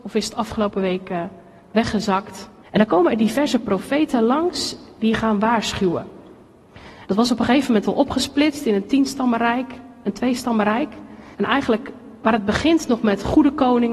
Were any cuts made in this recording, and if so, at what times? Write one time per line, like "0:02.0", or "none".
0:02.6
0:07.1
0:11.3